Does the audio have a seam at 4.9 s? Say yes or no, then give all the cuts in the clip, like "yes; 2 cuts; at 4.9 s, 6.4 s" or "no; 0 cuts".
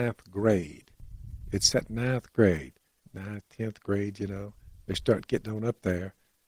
no; 1 cut; at 3.0 s